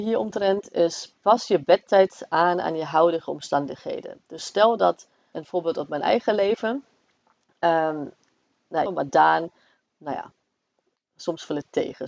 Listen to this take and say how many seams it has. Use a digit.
2